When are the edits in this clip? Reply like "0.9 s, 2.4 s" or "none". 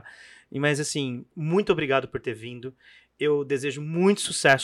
1.3 s